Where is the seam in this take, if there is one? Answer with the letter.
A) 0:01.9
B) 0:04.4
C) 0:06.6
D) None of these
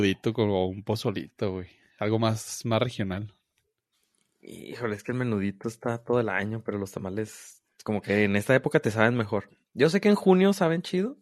D